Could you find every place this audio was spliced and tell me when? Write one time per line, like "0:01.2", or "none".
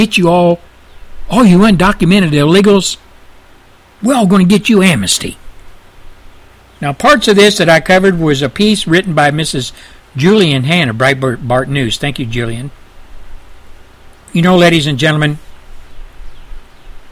none